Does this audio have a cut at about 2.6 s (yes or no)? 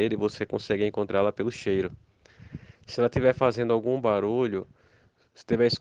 no